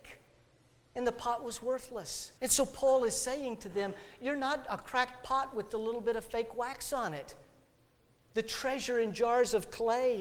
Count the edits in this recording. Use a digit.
2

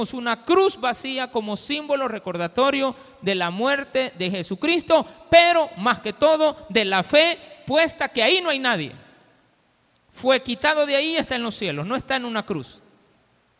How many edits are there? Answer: 0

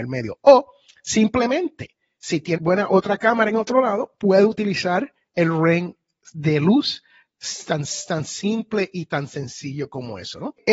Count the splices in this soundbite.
1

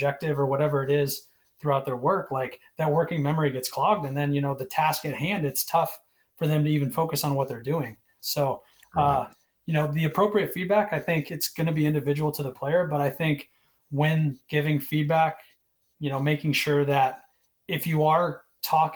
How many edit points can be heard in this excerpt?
1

